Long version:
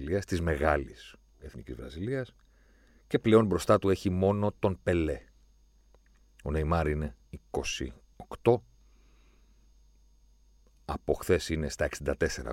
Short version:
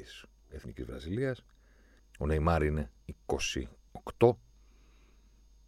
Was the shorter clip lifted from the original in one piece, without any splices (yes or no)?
no